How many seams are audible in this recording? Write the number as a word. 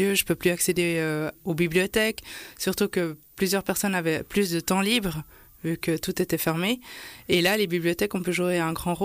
zero